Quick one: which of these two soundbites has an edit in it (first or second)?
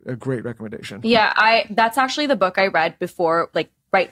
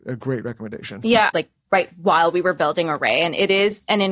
second